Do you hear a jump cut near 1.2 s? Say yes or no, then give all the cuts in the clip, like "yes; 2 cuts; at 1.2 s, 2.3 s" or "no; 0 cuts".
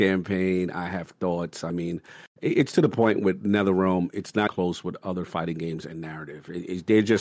no; 1 cut; at 4.5 s